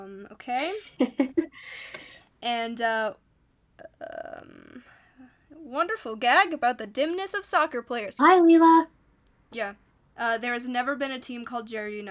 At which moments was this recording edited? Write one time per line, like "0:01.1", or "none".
0:08.2
0:09.9